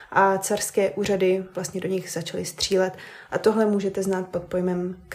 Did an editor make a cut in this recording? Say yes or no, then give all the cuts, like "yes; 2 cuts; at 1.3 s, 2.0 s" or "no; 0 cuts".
no; 0 cuts